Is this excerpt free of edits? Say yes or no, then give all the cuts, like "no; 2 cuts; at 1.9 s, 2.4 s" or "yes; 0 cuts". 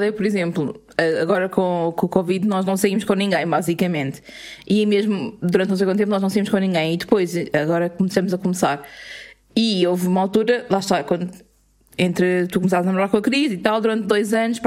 yes; 0 cuts